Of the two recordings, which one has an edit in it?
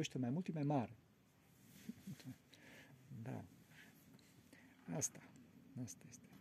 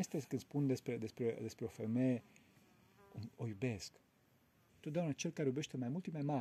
second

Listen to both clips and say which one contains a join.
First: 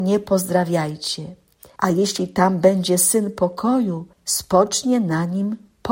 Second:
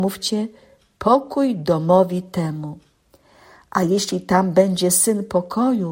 first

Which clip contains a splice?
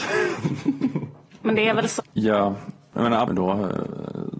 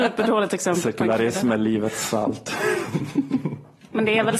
first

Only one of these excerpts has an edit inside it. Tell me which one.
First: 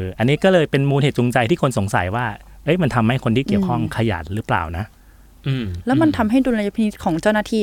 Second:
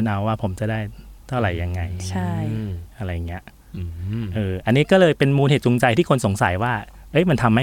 second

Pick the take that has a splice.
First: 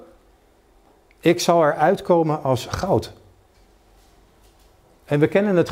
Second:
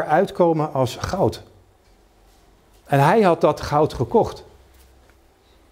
second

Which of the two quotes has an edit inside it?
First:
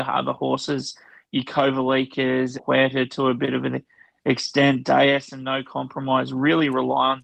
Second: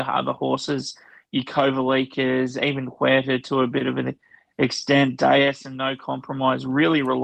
first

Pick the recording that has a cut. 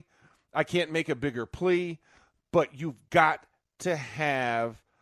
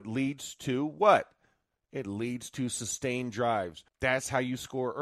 second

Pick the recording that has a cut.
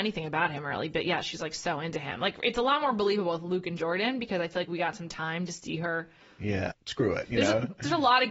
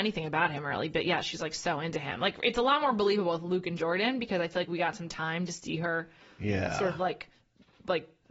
first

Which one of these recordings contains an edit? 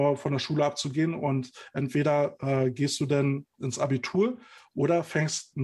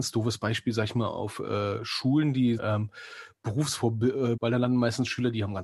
second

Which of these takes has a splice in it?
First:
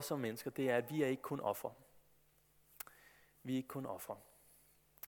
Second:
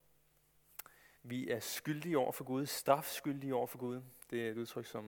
second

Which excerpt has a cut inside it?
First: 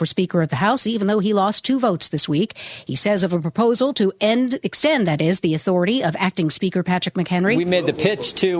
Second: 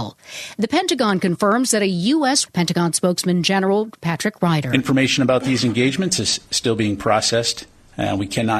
second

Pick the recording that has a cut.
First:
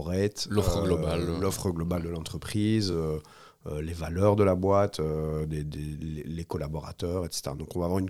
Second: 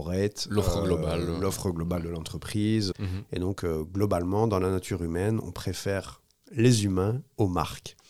second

